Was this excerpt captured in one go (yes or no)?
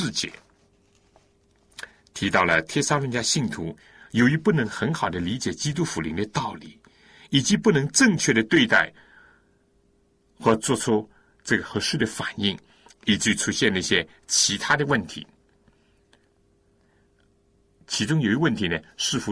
yes